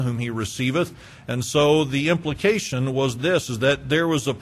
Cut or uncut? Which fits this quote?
uncut